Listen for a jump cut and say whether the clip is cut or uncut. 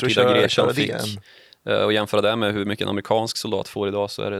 uncut